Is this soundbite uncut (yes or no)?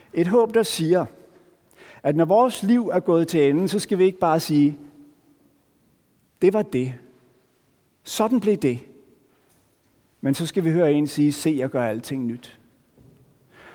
yes